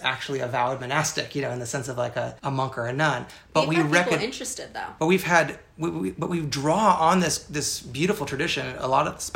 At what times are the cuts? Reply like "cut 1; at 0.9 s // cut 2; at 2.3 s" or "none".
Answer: cut 1; at 2.4 s // cut 2; at 5.0 s